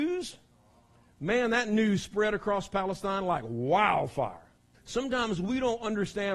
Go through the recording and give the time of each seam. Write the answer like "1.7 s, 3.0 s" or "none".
4.7 s